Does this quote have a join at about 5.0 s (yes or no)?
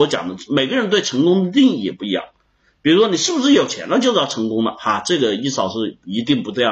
no